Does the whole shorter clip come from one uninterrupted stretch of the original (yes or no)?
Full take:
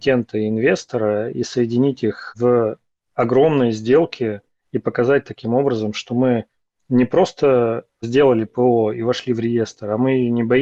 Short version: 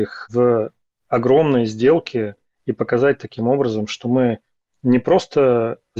yes